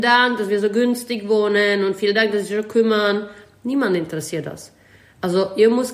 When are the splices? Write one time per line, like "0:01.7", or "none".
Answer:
none

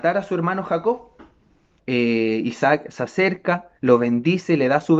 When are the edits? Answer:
0:01.8
0:03.8

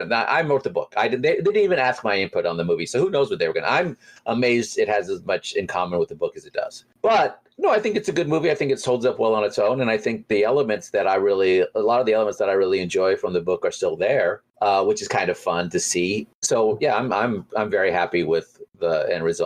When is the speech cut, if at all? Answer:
none

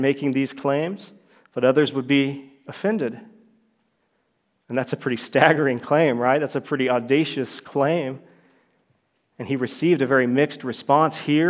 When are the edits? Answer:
0:04.6

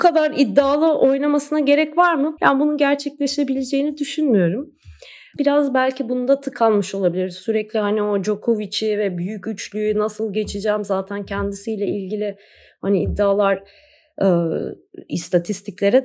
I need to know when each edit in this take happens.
0:02.4
0:05.4

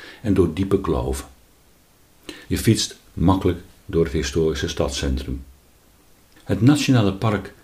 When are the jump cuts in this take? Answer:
0:02.4
0:06.4

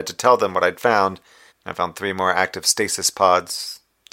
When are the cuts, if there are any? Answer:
0:01.5

